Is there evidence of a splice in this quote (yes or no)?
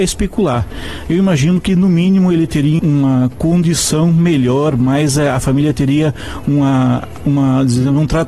yes